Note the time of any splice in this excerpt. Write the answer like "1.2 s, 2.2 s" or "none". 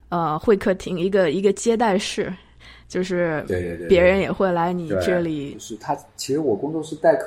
5.5 s